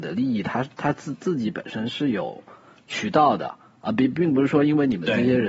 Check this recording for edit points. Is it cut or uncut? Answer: uncut